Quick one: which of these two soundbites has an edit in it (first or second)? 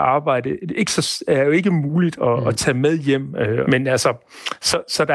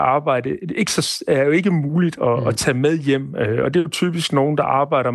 first